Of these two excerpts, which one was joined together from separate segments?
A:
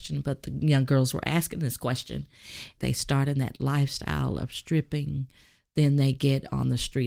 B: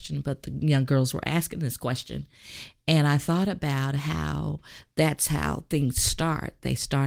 A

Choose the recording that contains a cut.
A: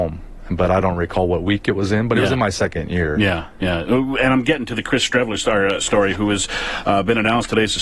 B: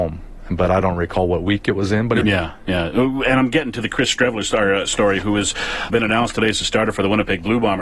B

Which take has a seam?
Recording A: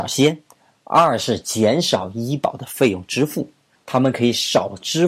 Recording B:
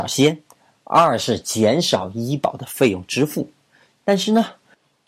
A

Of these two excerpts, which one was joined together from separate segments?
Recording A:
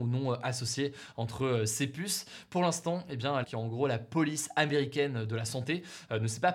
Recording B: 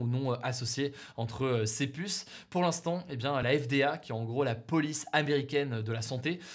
A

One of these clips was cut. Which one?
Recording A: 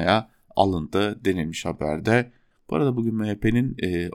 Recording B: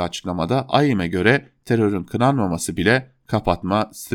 A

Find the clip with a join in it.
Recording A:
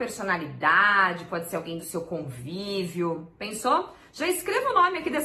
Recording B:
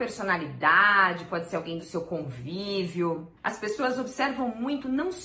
B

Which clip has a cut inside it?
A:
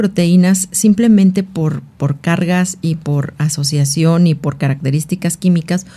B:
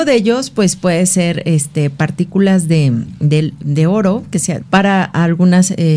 B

